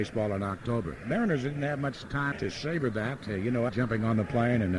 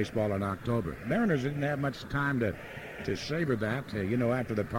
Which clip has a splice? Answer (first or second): first